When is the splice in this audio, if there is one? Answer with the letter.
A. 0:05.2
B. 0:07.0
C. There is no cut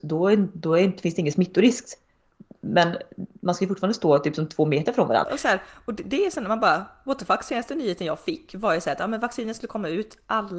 A